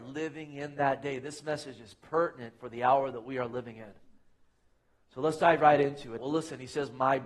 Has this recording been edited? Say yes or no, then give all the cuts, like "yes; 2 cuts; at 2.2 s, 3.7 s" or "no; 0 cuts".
yes; 1 cut; at 6.2 s